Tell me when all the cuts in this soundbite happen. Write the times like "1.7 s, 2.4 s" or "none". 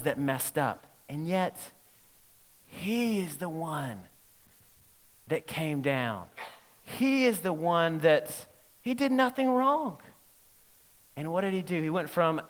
none